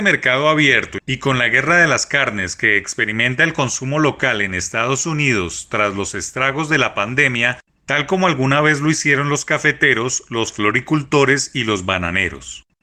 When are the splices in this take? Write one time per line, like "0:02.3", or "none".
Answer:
0:07.8